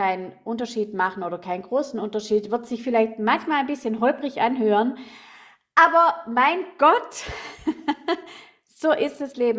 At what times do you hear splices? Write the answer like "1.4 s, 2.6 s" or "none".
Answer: none